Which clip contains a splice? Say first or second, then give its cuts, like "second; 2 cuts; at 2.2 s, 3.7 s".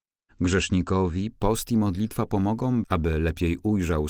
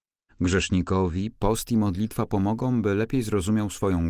first; 1 cut; at 2.8 s